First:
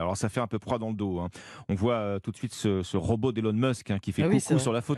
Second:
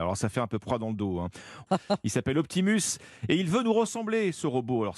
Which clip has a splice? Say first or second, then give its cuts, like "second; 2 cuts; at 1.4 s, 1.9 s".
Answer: second; 1 cut; at 1.7 s